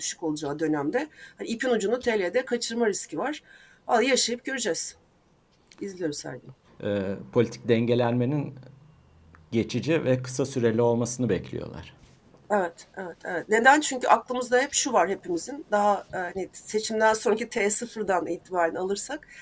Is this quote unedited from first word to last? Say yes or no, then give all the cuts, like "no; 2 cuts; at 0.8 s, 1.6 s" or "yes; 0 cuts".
no; 1 cut; at 6.7 s